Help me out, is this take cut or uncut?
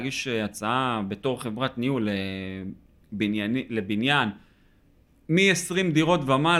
uncut